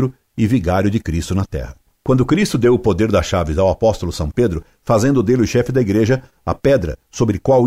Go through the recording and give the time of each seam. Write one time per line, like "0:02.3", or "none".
none